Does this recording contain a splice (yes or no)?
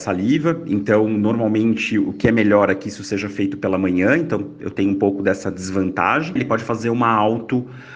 yes